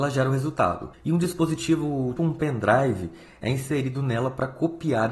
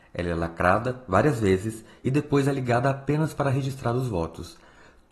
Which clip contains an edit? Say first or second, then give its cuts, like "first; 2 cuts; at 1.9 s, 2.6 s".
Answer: first; 2 cuts; at 0.9 s, 2.2 s